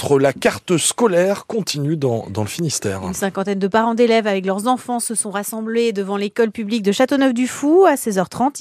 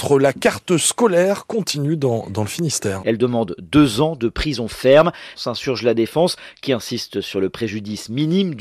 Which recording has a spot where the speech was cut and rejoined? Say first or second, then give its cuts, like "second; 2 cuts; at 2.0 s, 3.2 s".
second; 2 cuts; at 3.0 s, 5.3 s